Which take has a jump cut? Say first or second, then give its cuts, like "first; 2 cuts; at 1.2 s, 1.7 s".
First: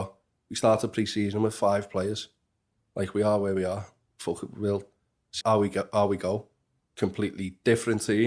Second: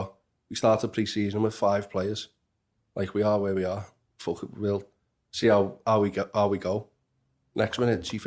first; 2 cuts; at 5.4 s, 6.8 s